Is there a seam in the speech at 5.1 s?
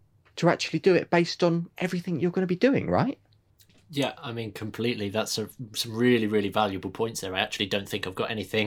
no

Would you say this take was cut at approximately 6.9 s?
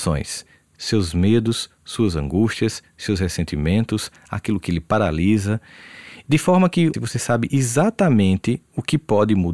yes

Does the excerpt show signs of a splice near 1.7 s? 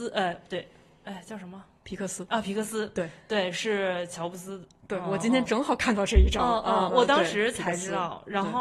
no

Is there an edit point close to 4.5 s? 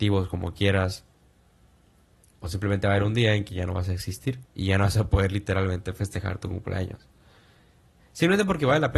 yes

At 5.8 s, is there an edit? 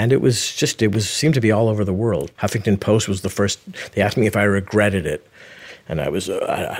no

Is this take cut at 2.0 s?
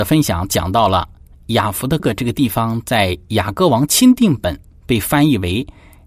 yes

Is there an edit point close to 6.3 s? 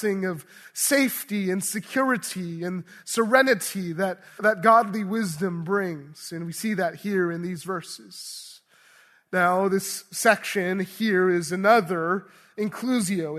no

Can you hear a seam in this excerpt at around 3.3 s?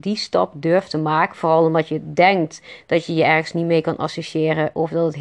no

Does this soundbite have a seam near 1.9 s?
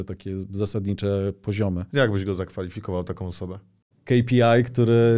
yes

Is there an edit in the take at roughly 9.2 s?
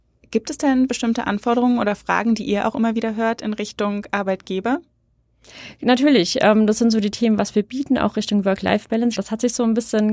yes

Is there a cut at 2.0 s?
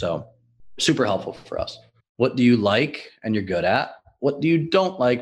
yes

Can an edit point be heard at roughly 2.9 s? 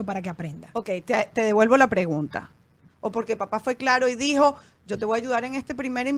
yes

